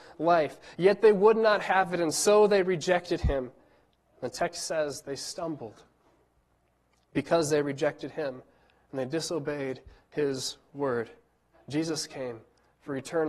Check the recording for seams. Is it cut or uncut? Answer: cut